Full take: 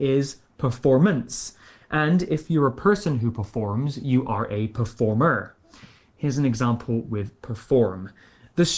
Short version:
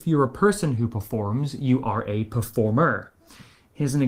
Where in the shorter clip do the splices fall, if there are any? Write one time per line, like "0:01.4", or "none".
none